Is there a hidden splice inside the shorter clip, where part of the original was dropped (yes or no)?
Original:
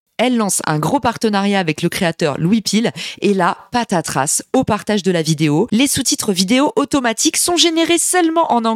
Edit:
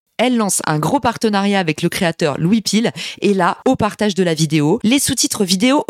yes